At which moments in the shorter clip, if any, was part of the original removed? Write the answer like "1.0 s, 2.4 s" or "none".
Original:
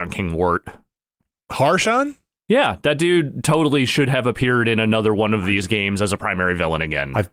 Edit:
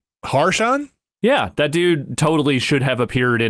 none